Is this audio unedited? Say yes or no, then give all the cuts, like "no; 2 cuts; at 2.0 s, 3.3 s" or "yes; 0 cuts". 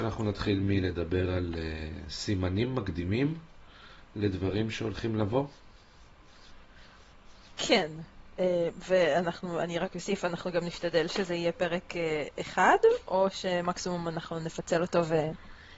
yes; 0 cuts